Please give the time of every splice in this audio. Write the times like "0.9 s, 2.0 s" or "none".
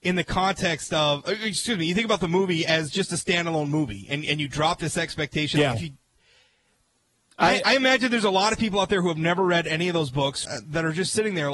5.7 s, 10.4 s